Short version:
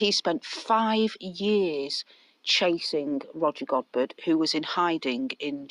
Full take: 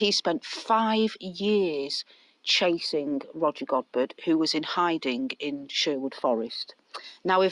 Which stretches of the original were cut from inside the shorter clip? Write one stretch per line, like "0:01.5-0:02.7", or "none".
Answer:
none